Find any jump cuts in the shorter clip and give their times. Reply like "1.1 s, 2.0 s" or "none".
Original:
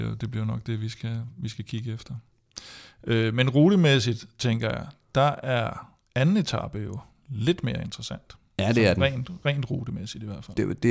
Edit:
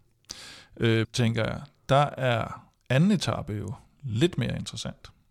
1.0 s